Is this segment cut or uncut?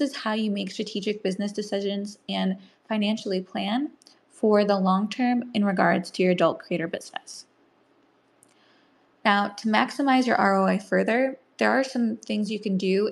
uncut